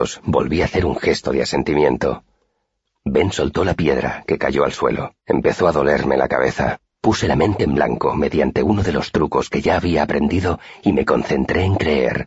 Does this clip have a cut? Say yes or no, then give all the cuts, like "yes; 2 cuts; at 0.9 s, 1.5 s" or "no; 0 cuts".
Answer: yes; 2 cuts; at 5.2 s, 6.9 s